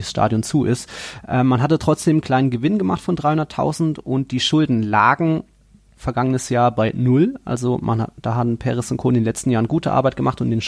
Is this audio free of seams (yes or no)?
yes